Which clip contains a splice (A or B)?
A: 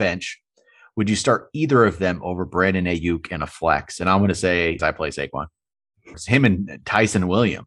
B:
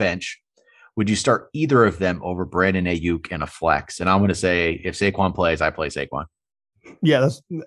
A